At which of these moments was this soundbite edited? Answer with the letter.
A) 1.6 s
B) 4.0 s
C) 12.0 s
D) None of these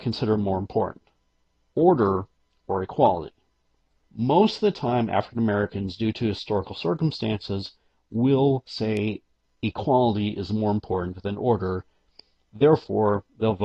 D